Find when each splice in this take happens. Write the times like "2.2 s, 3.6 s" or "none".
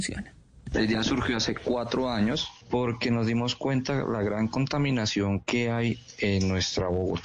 none